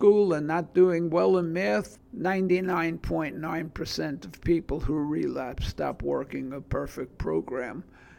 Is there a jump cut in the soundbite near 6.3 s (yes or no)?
no